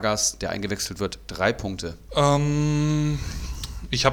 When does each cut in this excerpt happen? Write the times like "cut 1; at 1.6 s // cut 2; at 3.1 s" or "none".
cut 1; at 2.1 s